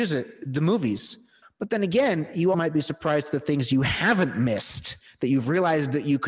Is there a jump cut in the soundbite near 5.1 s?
no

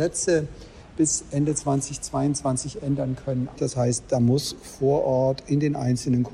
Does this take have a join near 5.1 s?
no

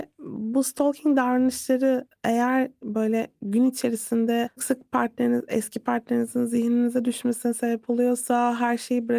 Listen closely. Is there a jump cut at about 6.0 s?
no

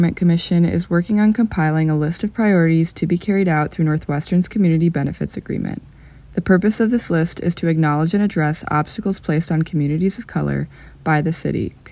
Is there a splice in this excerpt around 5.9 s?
no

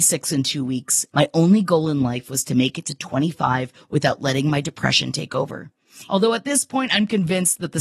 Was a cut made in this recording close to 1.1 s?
yes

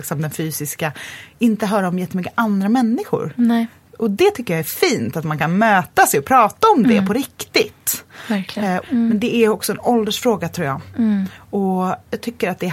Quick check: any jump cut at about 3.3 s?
no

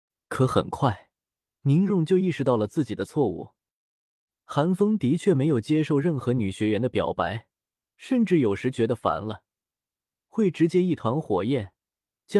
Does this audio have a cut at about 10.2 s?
no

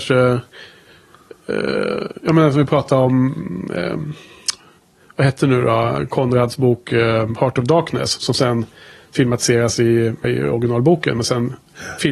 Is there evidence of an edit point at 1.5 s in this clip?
no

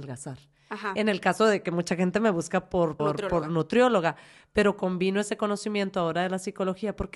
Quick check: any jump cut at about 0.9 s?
no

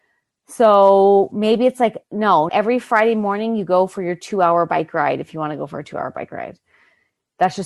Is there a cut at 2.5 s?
yes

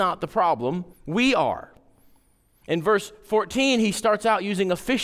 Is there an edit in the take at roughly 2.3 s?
no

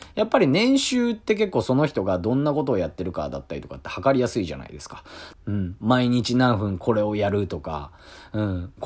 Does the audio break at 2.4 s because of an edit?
no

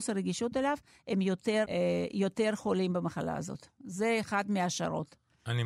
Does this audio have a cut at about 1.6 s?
yes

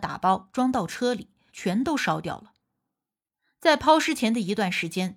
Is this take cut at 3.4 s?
no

